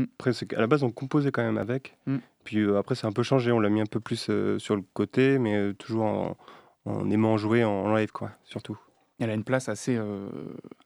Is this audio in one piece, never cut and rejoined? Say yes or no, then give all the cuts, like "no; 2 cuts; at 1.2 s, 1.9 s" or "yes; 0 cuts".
yes; 0 cuts